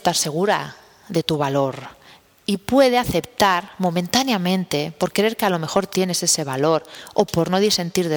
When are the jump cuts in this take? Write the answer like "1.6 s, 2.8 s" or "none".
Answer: none